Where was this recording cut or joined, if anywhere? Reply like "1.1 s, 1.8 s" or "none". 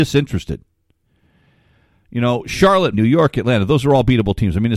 2.9 s